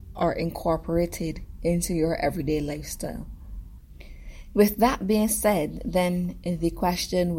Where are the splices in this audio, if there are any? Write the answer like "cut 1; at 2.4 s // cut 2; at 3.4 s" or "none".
none